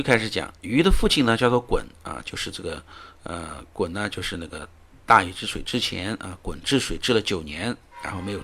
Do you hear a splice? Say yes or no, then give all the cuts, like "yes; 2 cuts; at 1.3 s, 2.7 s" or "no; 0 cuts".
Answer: no; 0 cuts